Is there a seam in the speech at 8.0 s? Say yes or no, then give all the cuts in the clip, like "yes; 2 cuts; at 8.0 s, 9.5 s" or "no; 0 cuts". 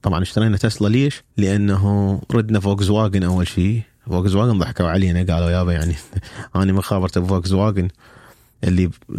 no; 1 cut; at 1.3 s